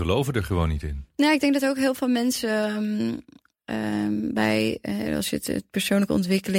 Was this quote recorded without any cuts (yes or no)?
yes